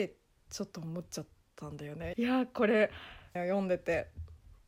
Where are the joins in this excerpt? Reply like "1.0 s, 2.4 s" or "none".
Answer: 2.1 s, 3.4 s